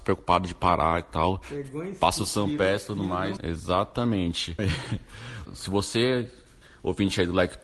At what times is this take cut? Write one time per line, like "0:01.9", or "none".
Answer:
0:03.4
0:05.4

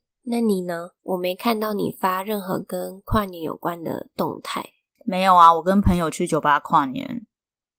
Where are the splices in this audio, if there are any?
0:01.0
0:05.0

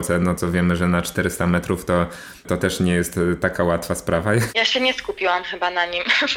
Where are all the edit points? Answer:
0:04.5

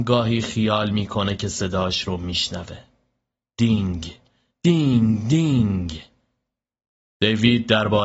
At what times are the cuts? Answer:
none

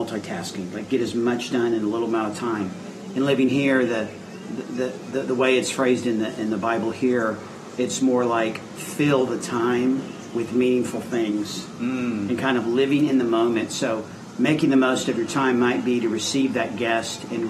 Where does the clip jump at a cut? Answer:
none

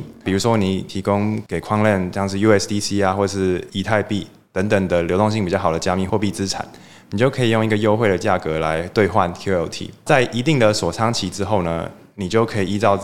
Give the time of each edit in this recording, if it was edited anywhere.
none

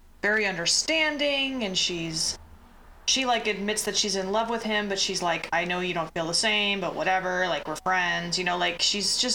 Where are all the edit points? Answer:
none

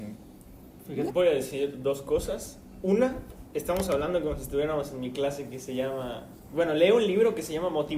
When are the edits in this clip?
0:01.1

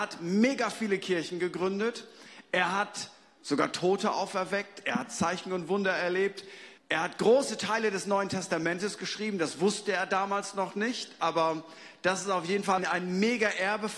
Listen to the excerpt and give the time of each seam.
0:06.8
0:12.8

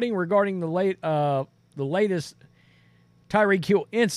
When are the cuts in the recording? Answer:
none

